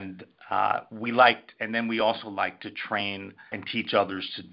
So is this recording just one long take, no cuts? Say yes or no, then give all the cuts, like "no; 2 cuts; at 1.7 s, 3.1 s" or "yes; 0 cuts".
no; 1 cut; at 3.5 s